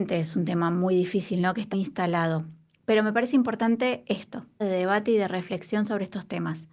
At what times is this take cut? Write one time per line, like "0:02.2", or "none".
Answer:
0:01.7
0:04.6